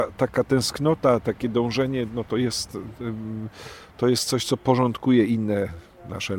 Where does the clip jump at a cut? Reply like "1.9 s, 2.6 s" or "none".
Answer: 1.2 s